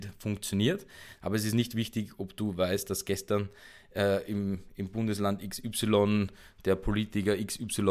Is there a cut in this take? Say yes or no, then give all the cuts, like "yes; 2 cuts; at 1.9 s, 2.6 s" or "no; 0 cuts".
yes; 1 cut; at 1.2 s